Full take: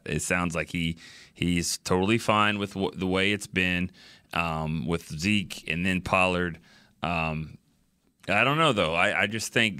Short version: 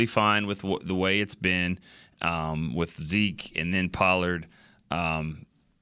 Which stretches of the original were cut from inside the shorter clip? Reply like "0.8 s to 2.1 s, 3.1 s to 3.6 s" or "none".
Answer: none